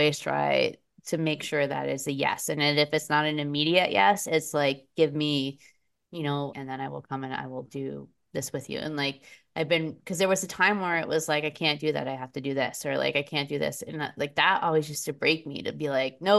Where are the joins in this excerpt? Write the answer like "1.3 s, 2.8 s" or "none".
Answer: 6.5 s